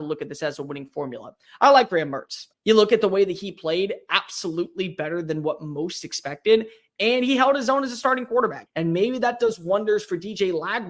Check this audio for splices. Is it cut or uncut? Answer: cut